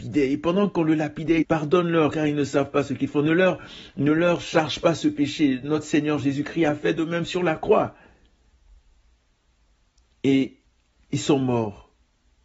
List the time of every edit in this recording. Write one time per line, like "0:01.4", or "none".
0:01.4